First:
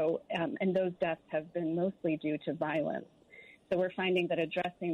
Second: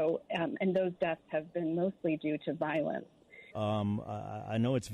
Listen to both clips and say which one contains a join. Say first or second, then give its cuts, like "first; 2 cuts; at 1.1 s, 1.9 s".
second; 1 cut; at 3.5 s